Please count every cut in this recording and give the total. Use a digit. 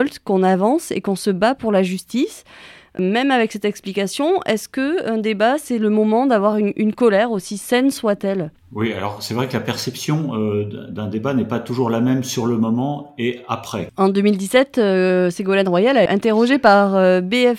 2